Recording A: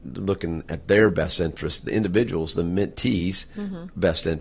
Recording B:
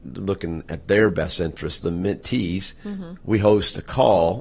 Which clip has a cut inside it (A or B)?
B